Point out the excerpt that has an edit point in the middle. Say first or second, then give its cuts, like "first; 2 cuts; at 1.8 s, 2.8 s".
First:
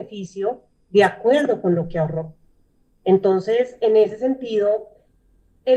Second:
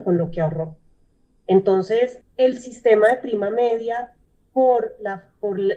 second; 1 cut; at 2.2 s